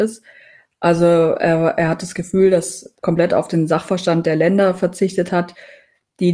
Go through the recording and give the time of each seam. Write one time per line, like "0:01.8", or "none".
0:03.0